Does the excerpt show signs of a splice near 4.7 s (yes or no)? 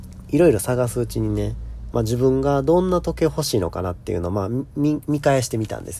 no